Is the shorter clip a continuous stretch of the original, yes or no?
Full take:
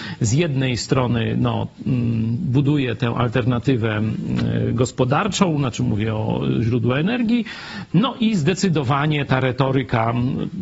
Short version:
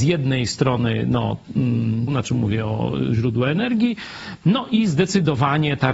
no